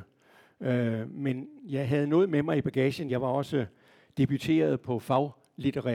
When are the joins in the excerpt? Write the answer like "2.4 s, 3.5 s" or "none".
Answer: 3.1 s